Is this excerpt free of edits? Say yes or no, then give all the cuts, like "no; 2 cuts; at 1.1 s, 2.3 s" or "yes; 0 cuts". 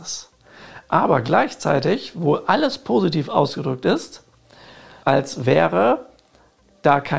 no; 1 cut; at 5.0 s